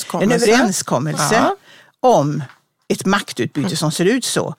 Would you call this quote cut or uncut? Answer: uncut